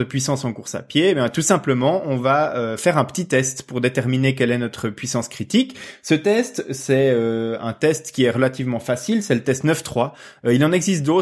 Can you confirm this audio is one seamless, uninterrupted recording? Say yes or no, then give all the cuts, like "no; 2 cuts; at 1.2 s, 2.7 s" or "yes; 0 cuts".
yes; 0 cuts